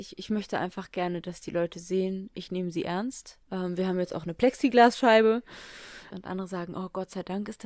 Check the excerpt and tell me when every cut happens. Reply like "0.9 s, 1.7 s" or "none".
3.4 s, 6.1 s